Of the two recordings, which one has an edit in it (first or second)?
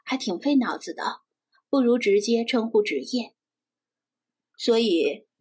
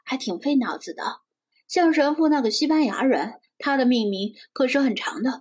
second